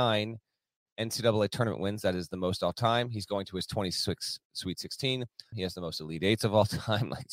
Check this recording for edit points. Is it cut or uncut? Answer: cut